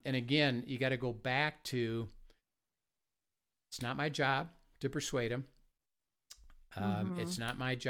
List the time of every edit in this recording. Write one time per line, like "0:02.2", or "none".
none